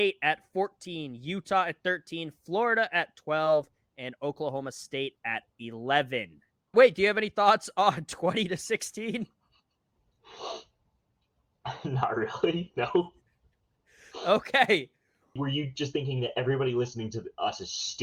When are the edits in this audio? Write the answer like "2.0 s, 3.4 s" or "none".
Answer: 6.7 s, 15.4 s

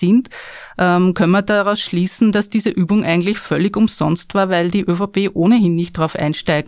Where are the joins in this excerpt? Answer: none

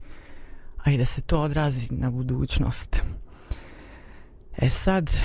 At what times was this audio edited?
none

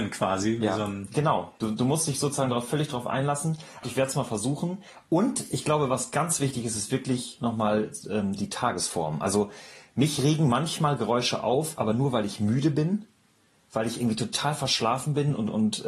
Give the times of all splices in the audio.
3.8 s

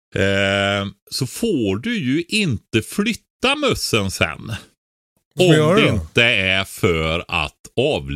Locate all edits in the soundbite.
none

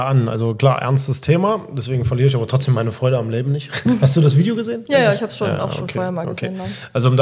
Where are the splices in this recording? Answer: none

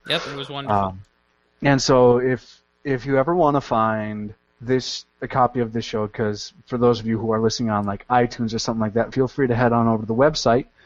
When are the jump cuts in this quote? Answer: none

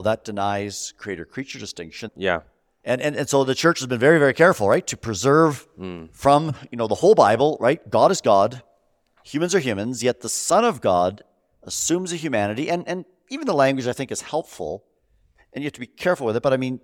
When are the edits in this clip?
2.1 s

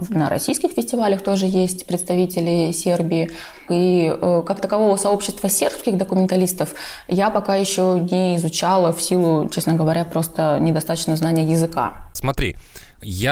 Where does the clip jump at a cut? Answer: 3.7 s, 12.2 s

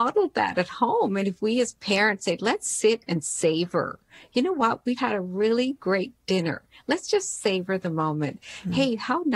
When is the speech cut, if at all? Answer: 5.0 s

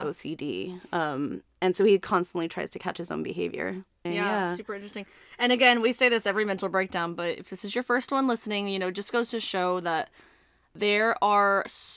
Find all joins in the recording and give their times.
4.1 s

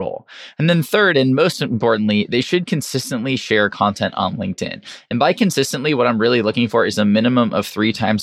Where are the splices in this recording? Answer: none

